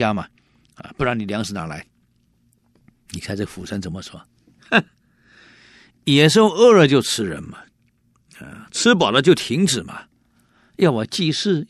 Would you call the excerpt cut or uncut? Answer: uncut